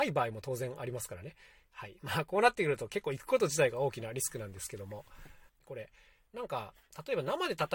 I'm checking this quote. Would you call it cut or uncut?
cut